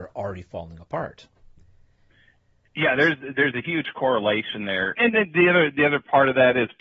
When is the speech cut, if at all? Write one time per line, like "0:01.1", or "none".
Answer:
0:05.0